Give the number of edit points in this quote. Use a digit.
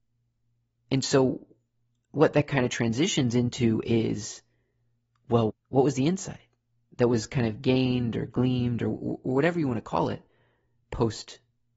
1